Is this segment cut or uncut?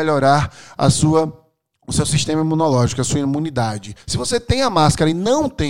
cut